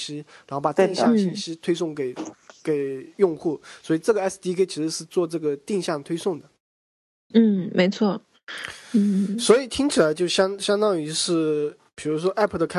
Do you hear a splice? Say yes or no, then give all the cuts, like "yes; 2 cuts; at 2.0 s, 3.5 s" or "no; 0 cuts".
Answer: yes; 1 cut; at 7.3 s